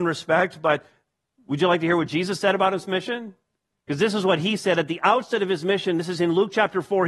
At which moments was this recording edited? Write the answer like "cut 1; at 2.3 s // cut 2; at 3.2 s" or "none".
none